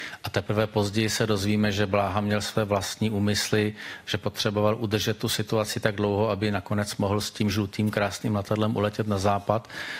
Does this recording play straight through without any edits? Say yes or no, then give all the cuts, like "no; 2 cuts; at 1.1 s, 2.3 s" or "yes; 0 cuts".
yes; 0 cuts